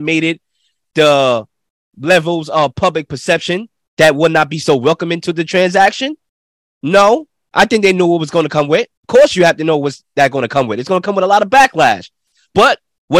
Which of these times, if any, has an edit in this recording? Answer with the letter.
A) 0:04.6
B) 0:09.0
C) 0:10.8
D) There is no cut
B